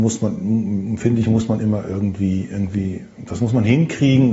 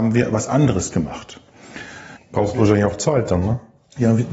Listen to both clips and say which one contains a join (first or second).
second